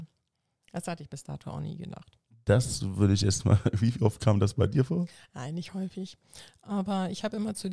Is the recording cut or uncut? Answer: uncut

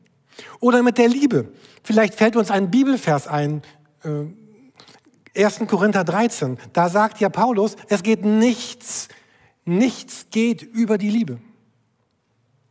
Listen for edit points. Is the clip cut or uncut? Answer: uncut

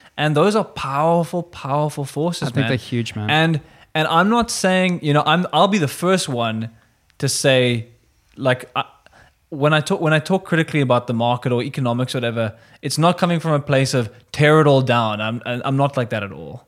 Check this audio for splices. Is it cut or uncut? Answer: uncut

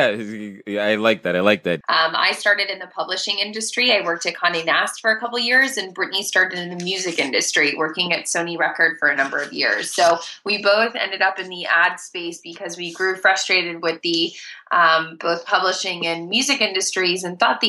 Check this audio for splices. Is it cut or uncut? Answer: cut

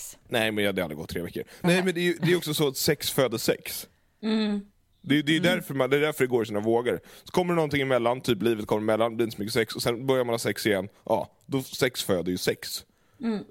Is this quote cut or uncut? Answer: cut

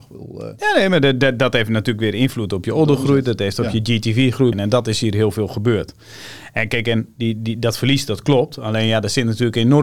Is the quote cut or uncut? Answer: cut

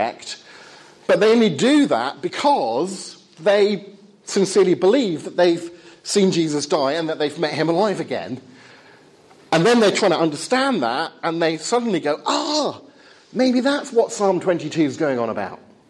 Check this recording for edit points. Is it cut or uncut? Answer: uncut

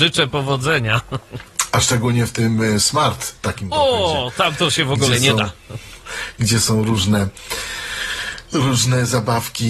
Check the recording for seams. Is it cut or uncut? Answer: uncut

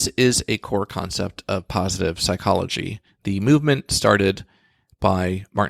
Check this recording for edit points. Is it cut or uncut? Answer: uncut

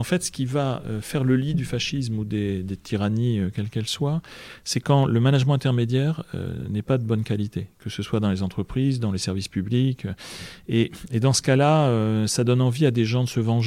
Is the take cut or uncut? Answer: uncut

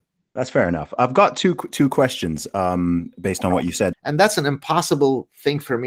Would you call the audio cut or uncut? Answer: cut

